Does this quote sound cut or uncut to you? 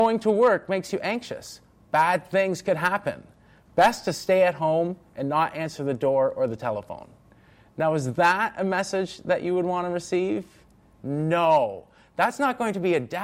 uncut